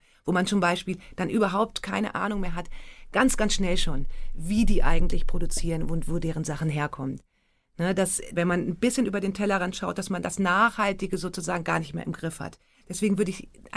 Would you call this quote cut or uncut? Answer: cut